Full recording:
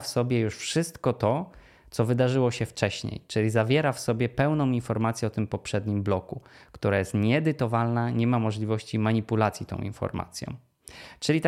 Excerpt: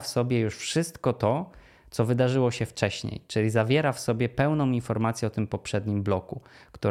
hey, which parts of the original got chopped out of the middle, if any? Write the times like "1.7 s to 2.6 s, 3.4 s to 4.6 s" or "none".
none